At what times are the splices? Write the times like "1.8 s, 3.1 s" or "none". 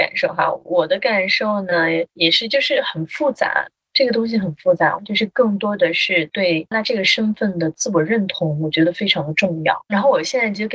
5.0 s, 6.7 s

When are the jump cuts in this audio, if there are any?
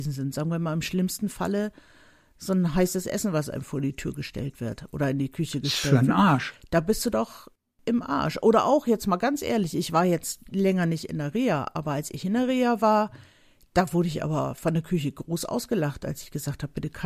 none

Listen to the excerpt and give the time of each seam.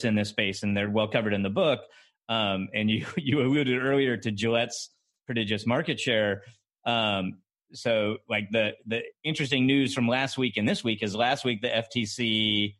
none

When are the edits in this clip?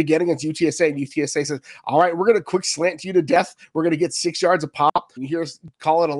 5.2 s

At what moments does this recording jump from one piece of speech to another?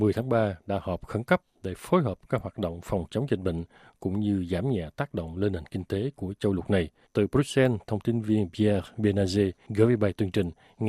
7.0 s

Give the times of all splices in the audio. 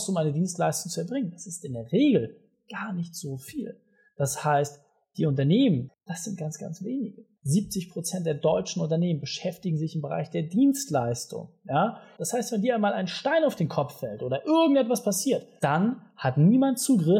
5.9 s, 7.4 s, 12.2 s

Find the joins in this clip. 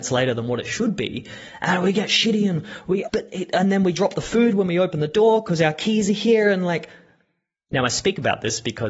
3.1 s

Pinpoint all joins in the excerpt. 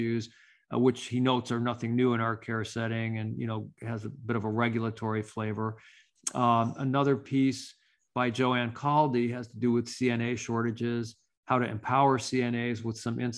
none

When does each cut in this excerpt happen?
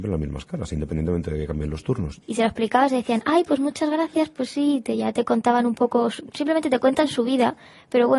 2.2 s

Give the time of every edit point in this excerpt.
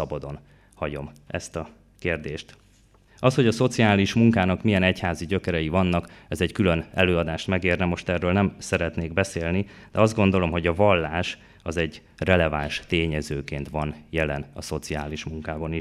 3.1 s

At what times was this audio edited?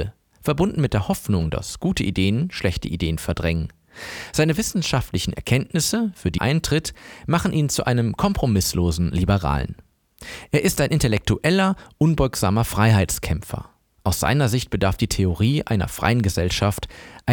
6.4 s

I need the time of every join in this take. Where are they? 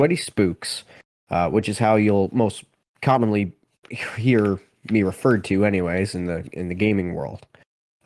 none

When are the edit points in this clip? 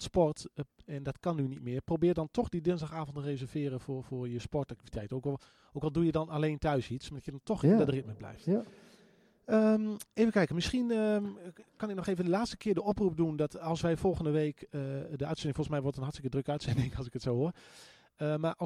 none

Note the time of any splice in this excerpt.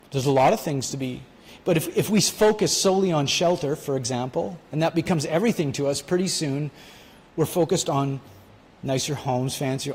none

